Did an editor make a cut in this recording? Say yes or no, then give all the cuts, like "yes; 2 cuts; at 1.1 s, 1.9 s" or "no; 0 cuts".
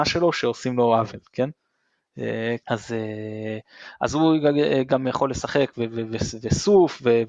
yes; 1 cut; at 2.6 s